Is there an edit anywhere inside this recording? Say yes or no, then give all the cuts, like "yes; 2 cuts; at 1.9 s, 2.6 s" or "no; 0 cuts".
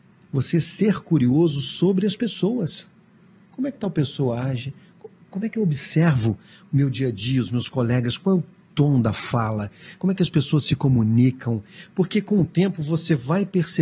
no; 0 cuts